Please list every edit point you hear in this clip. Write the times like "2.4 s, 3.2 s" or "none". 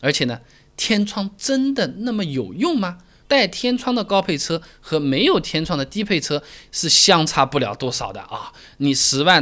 3.2 s